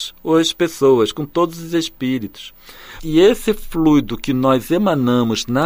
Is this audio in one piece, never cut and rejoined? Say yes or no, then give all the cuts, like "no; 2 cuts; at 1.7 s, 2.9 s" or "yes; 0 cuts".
no; 1 cut; at 3.0 s